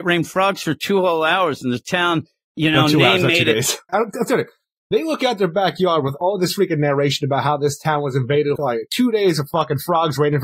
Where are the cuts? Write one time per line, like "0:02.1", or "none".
0:03.9
0:08.6